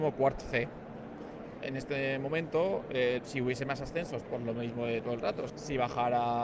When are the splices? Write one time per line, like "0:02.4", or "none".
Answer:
0:01.6
0:03.2
0:05.5